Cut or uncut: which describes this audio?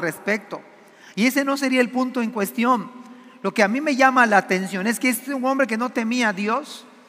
uncut